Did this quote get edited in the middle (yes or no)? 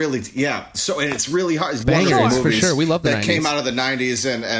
yes